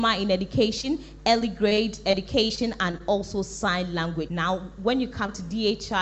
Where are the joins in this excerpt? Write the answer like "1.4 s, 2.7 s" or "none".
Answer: 4.3 s